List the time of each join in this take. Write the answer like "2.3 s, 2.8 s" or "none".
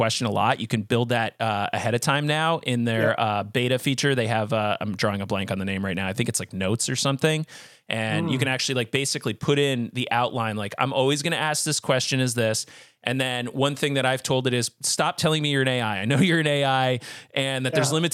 none